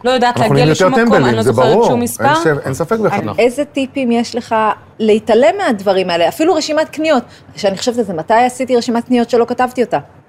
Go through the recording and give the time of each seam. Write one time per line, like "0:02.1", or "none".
0:03.2